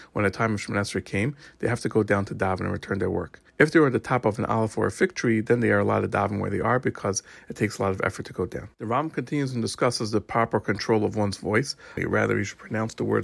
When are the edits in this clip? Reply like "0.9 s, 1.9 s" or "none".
3.5 s, 8.7 s, 12.0 s